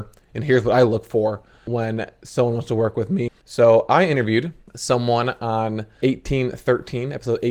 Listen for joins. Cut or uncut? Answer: cut